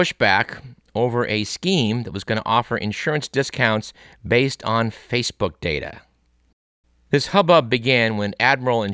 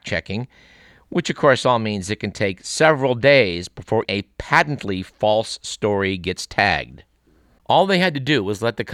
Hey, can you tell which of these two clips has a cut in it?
second; 2 cuts; at 4.0 s, 7.6 s

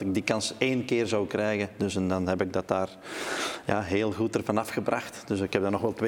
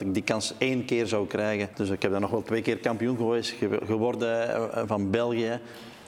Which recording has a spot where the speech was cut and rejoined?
second; 1 cut; at 1.7 s

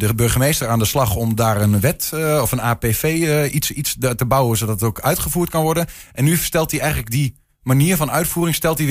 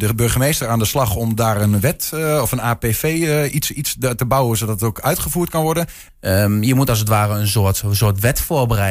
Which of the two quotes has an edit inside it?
second; 1 cut; at 6.1 s

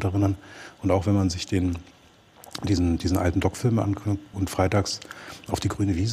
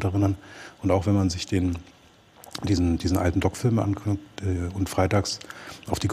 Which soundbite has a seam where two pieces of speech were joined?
first; 1 cut; at 4.3 s

